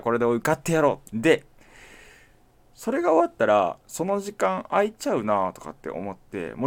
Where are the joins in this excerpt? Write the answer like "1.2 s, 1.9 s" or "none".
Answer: 1.0 s